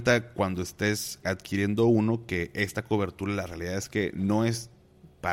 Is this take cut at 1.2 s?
yes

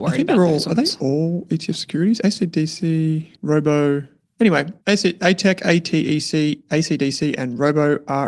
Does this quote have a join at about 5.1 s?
no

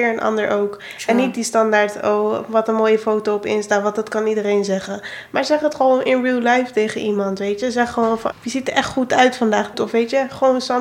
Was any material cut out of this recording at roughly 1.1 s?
no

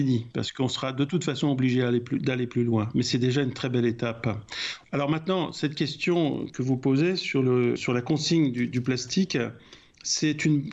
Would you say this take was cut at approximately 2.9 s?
no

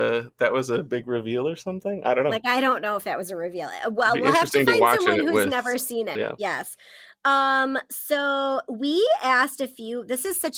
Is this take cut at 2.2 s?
no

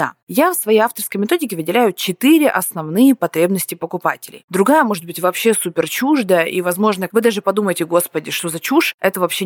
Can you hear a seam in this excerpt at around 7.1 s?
yes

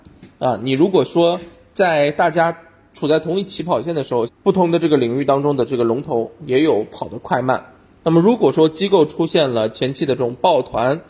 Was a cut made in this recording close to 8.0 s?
no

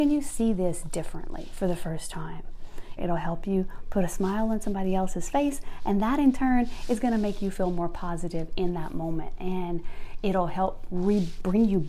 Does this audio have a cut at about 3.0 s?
yes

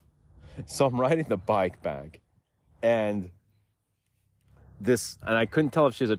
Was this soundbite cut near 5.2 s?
yes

